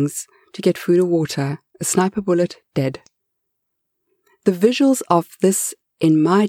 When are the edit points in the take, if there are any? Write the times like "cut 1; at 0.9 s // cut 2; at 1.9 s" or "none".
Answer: cut 1; at 1.7 s

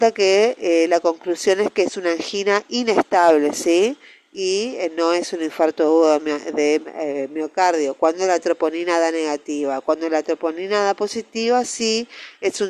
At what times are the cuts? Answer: none

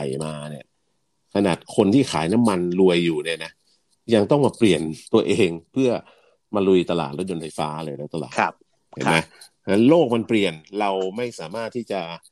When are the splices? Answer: cut 1; at 5.1 s

